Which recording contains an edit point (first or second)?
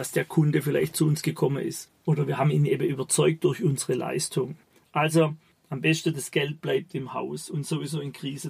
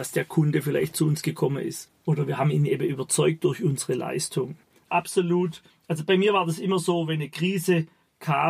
second